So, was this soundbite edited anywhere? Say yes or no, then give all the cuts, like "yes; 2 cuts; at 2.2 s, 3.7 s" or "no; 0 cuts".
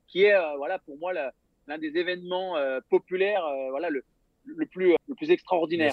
yes; 1 cut; at 5.0 s